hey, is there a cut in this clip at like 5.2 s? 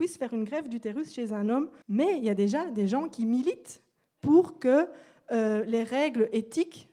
no; 1 cut; at 1.8 s

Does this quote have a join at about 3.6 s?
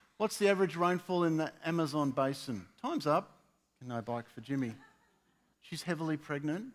no; 1 cut; at 5.5 s

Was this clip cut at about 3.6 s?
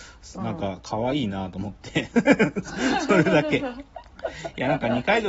no; 0 cuts

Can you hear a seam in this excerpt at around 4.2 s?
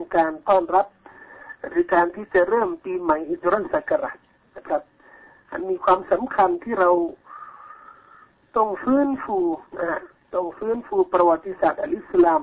no; 1 cut; at 9.7 s

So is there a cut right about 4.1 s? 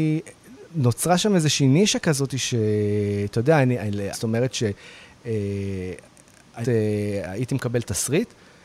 yes; 2 cuts; at 4.1 s, 6.6 s

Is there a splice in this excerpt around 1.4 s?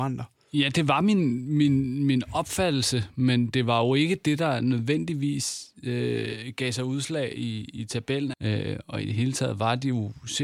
no; 1 cut; at 8.3 s

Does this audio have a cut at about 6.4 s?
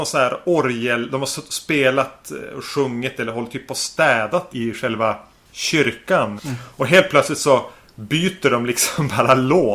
yes; 2 cuts; at 4.5 s, 6.4 s

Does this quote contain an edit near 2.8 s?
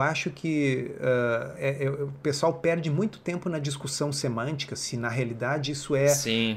no; 1 cut; at 1.6 s

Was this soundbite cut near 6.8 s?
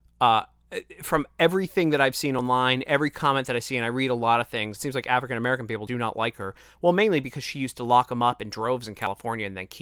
no; 1 cut; at 4.8 s

